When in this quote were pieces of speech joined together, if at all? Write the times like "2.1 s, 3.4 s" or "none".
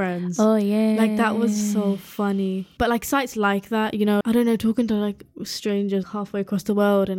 4.2 s, 6.0 s